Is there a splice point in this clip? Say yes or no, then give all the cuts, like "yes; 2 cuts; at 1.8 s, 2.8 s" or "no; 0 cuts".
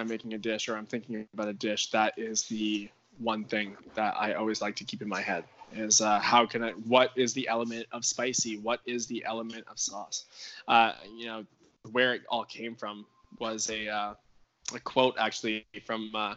no; 0 cuts